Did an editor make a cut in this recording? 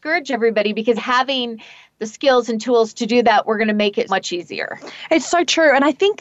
yes; 2 cuts; at 1.0 s, 4.1 s

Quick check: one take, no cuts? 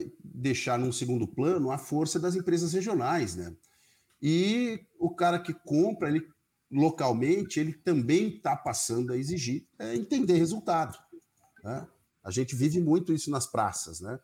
no; 2 cuts; at 9.7 s, 12.2 s

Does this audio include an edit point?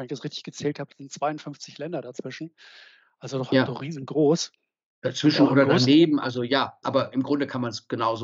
yes; 1 cut; at 6.8 s

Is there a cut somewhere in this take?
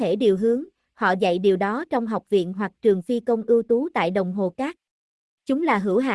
no; 0 cuts

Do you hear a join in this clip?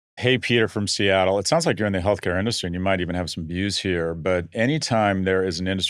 no; 0 cuts

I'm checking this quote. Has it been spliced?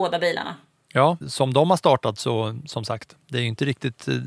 yes; 1 cut; at 1.2 s

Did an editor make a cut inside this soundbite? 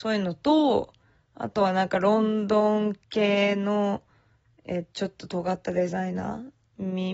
yes; 1 cut; at 3.0 s

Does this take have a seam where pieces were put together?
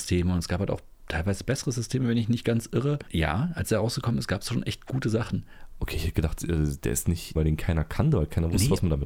yes; 2 cuts; at 3.1 s, 7.4 s

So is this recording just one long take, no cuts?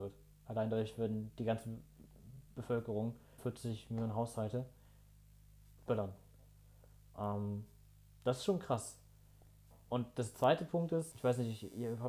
no; 2 cuts; at 3.4 s, 11.1 s

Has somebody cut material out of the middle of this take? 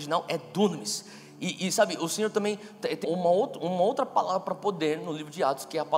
yes; 1 cut; at 3.0 s

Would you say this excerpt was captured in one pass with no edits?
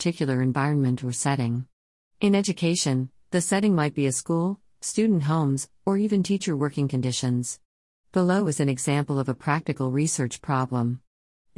yes; 0 cuts

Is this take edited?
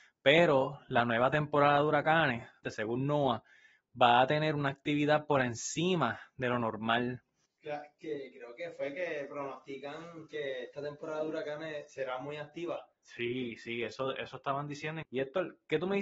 yes; 3 cuts; at 2.6 s, 7.5 s, 15.0 s

